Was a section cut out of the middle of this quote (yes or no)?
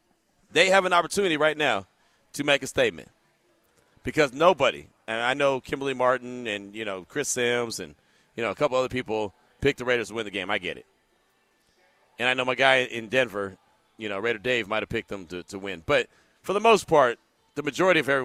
no